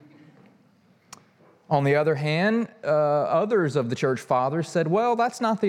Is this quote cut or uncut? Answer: uncut